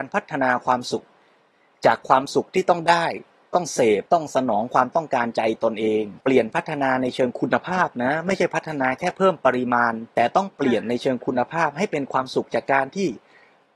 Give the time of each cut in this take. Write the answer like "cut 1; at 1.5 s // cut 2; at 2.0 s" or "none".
cut 1; at 4.1 s // cut 2; at 6.2 s // cut 3; at 10.1 s